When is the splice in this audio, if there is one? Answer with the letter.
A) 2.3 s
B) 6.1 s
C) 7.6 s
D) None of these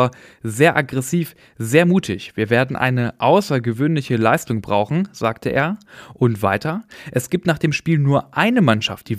D